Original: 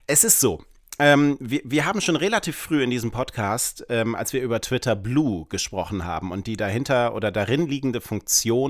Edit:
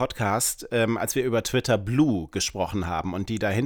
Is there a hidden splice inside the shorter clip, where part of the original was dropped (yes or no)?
no